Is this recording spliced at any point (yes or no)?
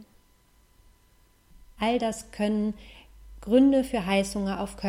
yes